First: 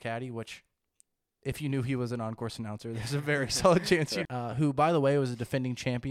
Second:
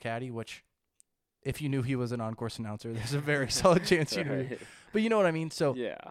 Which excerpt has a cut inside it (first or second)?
first